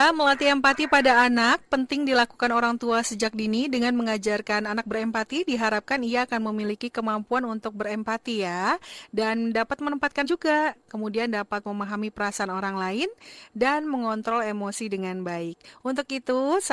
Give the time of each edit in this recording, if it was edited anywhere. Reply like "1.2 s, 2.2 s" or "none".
10.2 s